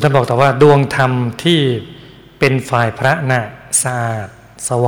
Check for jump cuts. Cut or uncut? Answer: cut